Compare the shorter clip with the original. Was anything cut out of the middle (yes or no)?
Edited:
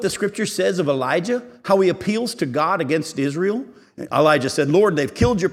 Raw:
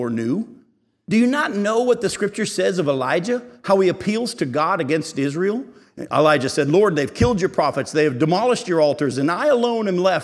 no